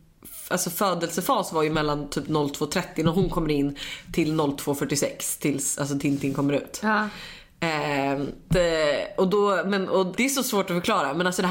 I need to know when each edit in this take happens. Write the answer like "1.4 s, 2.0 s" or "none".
8.5 s, 10.1 s